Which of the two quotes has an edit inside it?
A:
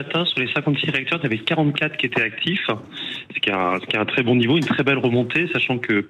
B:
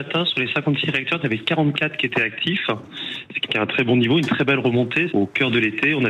B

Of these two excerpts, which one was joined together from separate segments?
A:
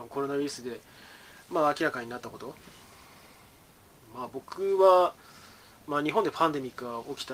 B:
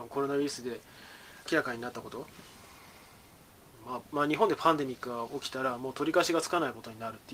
B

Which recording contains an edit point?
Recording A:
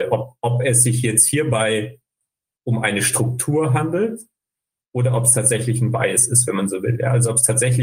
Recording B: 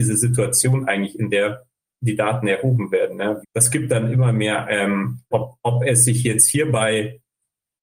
B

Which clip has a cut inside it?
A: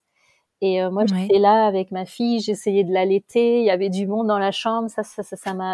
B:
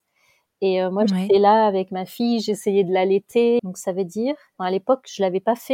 B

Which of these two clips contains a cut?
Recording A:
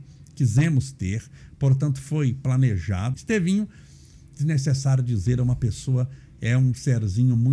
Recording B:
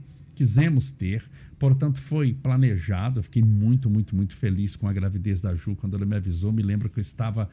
A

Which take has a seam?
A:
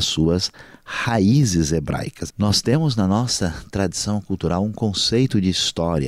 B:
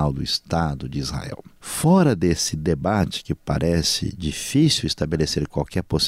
A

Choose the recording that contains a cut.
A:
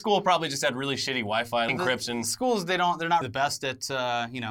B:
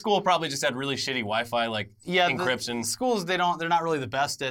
A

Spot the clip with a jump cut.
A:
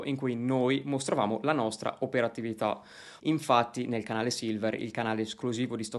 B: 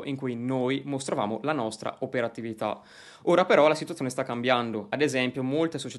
A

